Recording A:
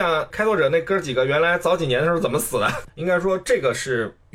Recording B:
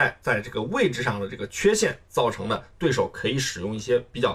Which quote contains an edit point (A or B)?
A